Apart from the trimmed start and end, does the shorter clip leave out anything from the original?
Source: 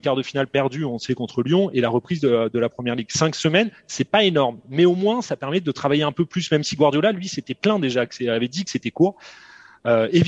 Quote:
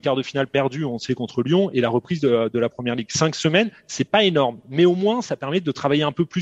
no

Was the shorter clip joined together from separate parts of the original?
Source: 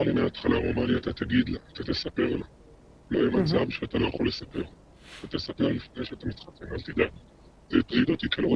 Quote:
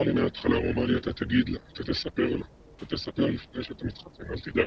yes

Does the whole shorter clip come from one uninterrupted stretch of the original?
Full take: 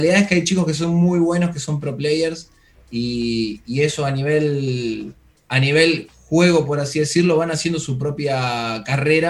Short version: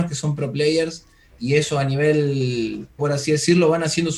no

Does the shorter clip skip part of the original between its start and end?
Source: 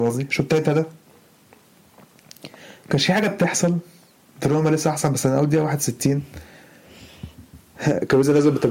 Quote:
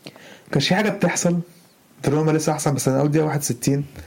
no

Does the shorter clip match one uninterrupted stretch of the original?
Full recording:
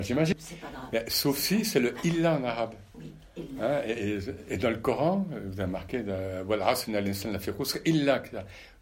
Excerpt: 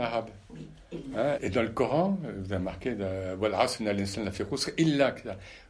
no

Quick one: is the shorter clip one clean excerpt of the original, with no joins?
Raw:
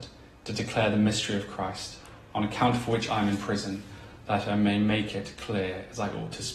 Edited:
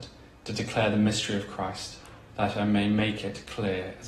no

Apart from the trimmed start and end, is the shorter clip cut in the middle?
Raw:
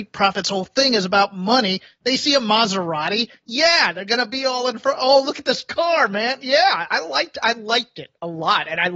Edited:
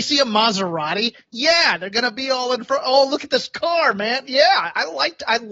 no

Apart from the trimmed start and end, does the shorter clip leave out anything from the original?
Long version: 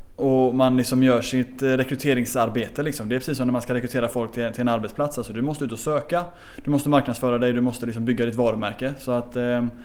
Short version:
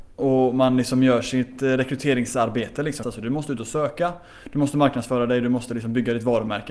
yes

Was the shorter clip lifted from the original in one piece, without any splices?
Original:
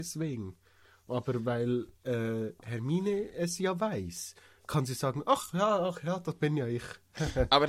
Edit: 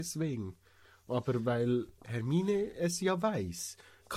no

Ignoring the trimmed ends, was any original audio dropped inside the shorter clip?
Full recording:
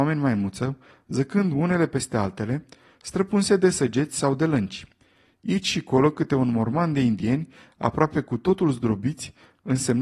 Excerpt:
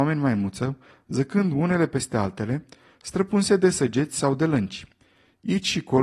no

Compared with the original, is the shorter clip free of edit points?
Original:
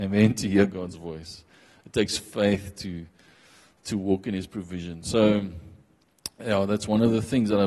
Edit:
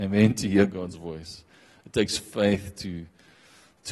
yes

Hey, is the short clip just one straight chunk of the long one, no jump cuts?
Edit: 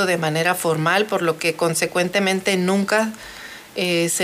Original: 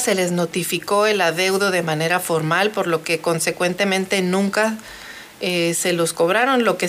yes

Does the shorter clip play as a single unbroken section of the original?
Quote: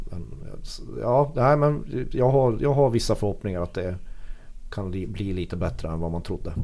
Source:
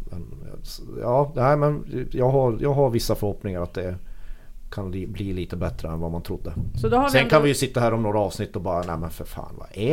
yes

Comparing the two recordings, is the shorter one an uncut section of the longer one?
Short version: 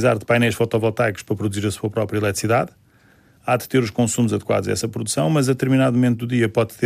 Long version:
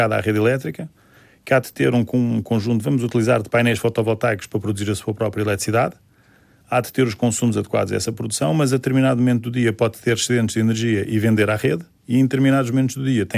yes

